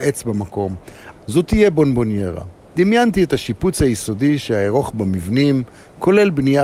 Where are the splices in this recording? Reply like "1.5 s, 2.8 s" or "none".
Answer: 1.1 s